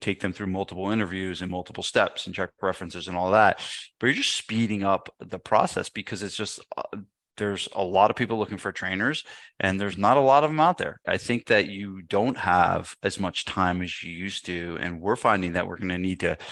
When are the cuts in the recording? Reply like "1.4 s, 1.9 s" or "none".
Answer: 11.0 s